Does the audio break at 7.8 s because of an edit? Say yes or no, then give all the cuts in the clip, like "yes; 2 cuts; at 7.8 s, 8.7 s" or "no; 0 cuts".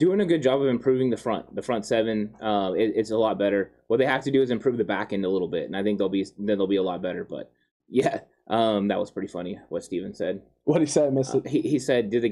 yes; 1 cut; at 7.8 s